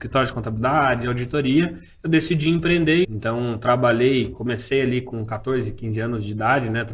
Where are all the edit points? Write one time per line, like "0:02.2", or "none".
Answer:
0:03.0